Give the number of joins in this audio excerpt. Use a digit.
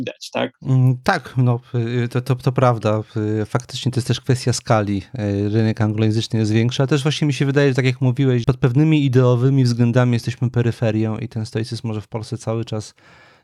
1